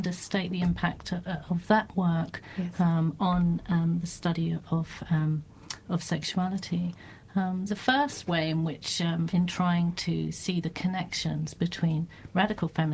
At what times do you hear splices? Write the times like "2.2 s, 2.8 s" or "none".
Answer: 7.7 s, 9.3 s